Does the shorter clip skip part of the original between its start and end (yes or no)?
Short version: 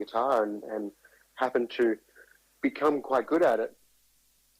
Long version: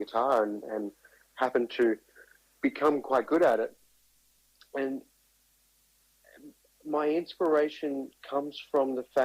no